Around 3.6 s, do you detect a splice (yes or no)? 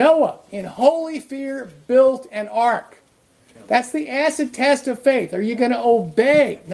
yes